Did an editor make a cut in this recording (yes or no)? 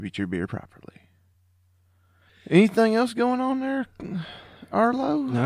no